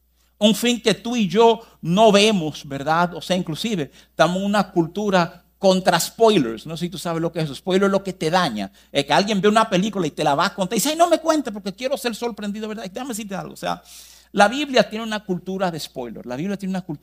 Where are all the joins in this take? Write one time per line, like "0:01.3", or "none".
0:11.4